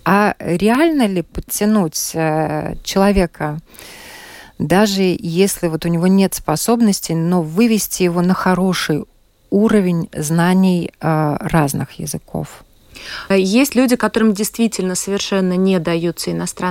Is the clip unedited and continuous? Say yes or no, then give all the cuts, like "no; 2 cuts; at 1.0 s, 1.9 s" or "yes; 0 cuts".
no; 1 cut; at 13.3 s